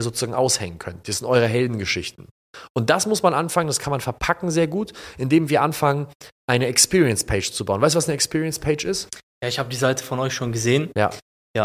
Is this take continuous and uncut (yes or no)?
yes